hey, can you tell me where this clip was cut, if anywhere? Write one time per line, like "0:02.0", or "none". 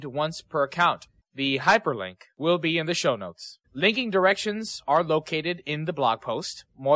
0:01.2
0:03.6